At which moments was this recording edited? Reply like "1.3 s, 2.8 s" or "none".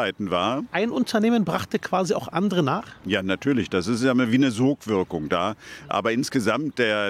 5.9 s